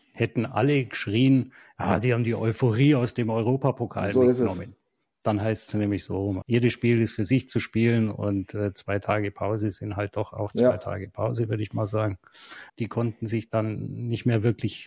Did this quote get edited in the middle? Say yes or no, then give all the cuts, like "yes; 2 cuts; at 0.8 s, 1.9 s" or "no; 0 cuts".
yes; 2 cuts; at 6.4 s, 12.7 s